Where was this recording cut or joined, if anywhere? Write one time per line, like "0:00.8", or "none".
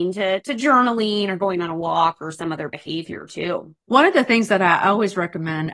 0:03.8